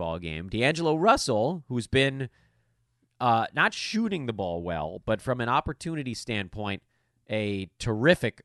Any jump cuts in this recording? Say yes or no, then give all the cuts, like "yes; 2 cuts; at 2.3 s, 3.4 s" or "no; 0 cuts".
no; 0 cuts